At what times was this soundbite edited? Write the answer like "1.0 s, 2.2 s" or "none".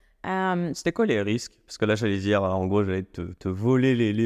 none